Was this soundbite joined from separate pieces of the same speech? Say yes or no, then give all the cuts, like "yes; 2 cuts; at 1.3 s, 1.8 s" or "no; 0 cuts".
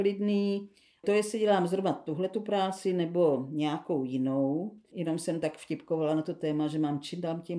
yes; 2 cuts; at 1.0 s, 4.9 s